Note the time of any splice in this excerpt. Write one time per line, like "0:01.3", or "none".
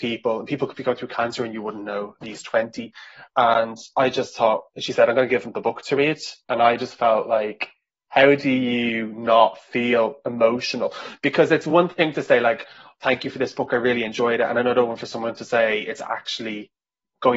0:02.2
0:06.4